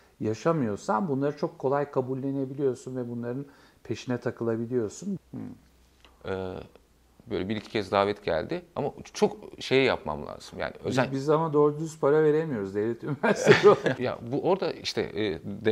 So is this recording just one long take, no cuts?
no; 2 cuts; at 5.2 s, 14.0 s

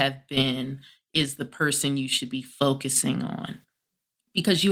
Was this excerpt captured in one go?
yes; 0 cuts

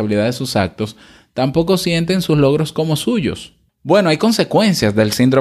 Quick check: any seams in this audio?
yes; 1 cut; at 3.7 s

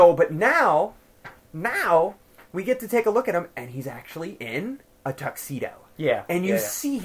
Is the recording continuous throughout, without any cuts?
yes; 0 cuts

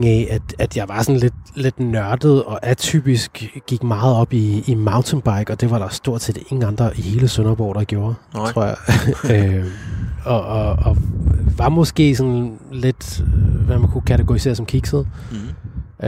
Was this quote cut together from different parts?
no; 0 cuts

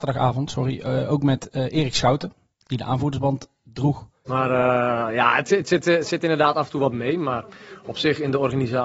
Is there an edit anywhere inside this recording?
yes; 1 cut; at 4.3 s

